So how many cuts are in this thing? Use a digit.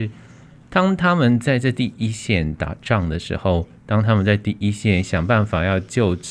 0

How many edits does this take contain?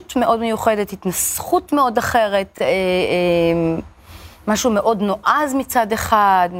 0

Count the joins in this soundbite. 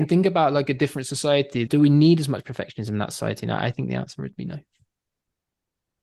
1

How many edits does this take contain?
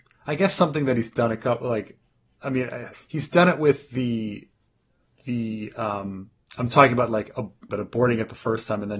2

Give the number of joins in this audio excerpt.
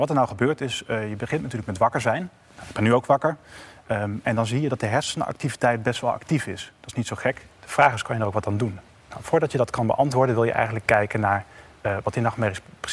1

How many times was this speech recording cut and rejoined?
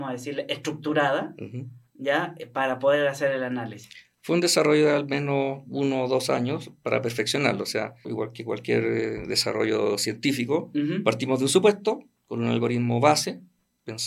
1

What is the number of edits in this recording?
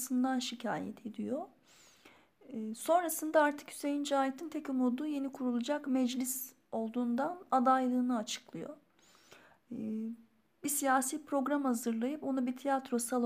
1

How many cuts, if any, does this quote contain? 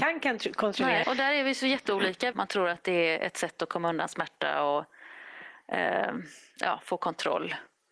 2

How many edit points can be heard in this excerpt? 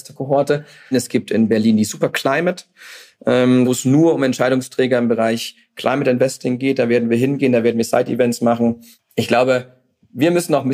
2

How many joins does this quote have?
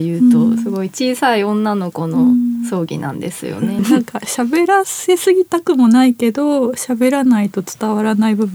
1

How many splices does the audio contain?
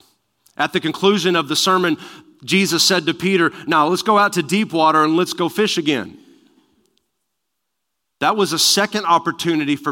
0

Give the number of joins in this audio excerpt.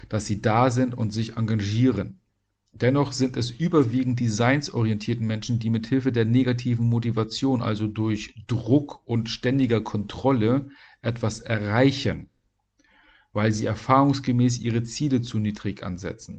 0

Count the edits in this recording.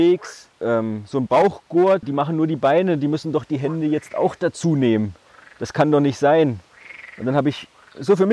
1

